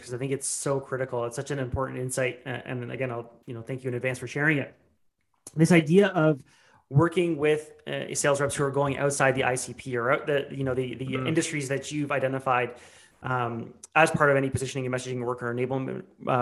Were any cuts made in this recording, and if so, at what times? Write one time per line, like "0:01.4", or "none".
none